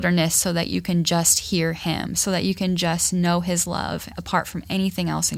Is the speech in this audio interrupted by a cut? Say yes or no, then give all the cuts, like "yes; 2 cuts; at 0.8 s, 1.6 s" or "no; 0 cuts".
no; 0 cuts